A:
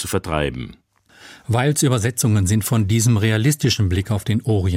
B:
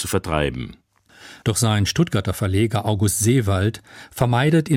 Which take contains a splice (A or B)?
B